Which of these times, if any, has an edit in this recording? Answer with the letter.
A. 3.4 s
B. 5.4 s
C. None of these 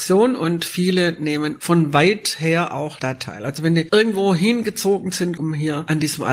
B